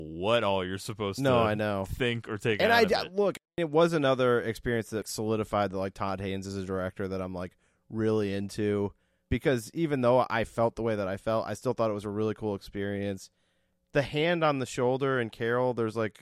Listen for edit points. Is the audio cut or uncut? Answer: uncut